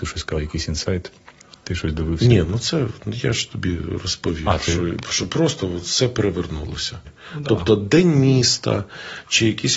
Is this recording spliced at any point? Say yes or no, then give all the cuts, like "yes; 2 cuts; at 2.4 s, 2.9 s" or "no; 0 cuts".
yes; 1 cut; at 7.0 s